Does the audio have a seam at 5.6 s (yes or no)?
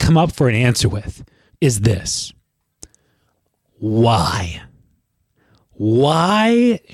no